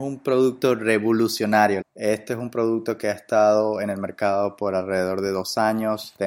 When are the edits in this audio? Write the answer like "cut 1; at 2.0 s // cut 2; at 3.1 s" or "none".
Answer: cut 1; at 1.8 s